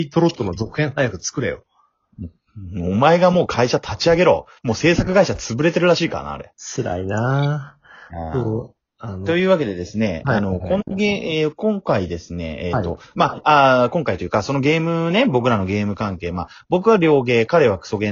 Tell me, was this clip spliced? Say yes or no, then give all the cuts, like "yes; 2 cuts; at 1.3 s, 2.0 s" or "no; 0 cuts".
no; 0 cuts